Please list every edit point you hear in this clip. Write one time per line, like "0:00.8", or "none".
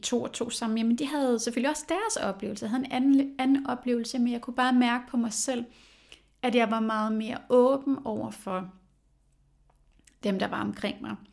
none